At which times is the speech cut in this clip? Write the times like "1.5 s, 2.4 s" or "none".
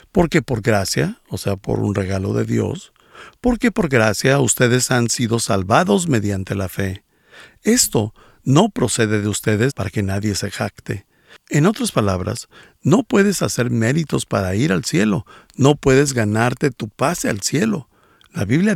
9.7 s